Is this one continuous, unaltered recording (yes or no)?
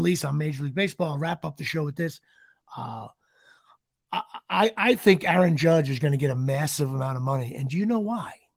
yes